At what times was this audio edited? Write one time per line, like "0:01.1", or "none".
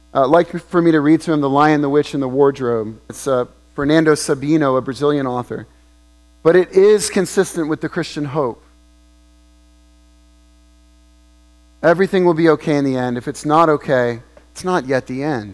0:03.1